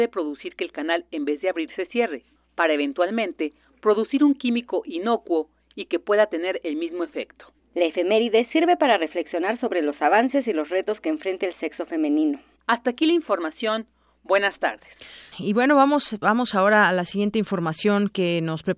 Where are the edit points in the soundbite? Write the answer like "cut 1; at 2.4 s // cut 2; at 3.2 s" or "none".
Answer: cut 1; at 7.6 s // cut 2; at 12.5 s // cut 3; at 15.3 s